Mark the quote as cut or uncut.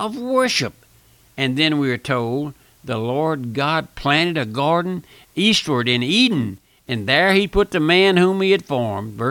uncut